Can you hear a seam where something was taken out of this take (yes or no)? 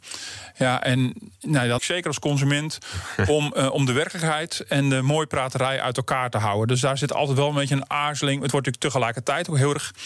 yes